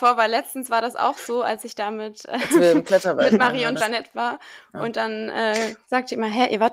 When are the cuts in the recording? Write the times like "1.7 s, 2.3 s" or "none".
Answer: none